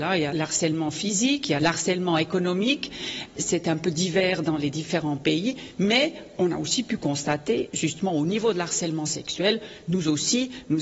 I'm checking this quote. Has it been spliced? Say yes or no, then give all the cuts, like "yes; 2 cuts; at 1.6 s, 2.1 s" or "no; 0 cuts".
no; 0 cuts